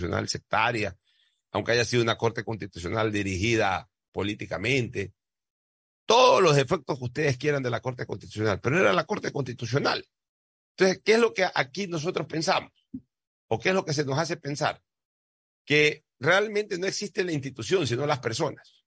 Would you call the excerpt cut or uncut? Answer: uncut